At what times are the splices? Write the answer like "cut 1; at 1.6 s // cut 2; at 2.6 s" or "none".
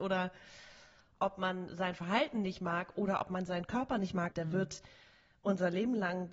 cut 1; at 4.3 s